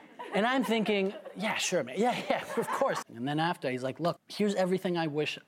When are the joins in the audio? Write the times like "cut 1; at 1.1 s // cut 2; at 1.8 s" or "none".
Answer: cut 1; at 3.0 s // cut 2; at 4.2 s